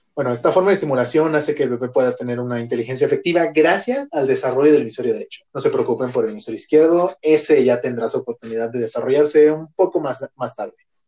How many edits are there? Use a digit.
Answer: 1